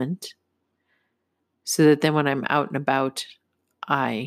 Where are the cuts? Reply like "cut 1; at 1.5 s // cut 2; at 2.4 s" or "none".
none